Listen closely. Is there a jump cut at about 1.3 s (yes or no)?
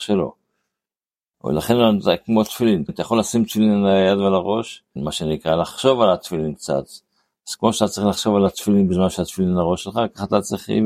yes